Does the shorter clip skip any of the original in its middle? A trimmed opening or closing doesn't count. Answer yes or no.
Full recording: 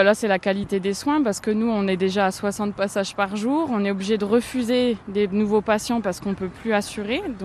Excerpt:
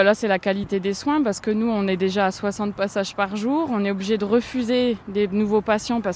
no